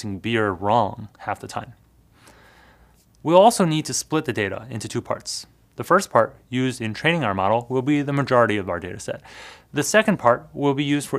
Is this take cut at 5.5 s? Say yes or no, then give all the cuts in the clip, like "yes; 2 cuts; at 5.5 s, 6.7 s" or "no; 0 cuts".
no; 0 cuts